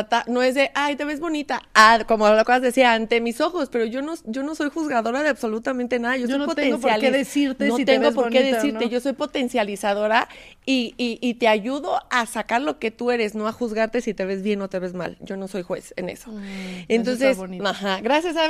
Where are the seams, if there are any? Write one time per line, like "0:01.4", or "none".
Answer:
none